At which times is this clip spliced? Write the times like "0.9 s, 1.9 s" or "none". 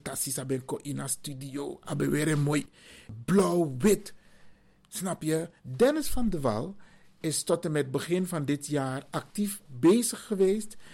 5.6 s